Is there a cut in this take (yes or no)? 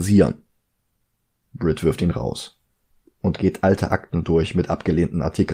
no